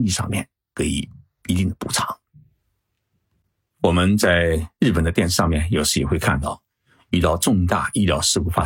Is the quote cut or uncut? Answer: uncut